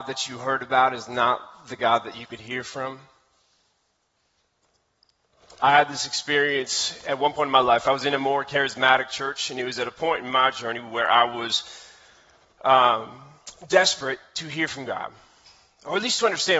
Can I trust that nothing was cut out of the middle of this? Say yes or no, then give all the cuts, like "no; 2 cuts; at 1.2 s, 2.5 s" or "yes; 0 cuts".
yes; 0 cuts